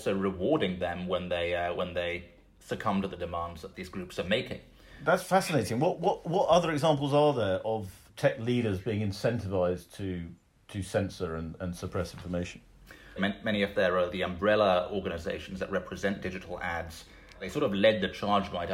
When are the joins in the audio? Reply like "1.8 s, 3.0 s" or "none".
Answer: 13.2 s